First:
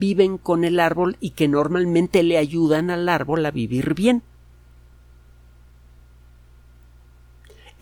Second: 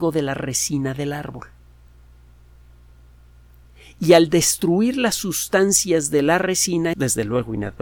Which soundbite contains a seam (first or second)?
second